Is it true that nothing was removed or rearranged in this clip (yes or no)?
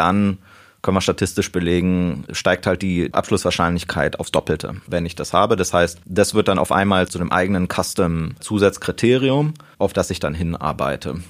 yes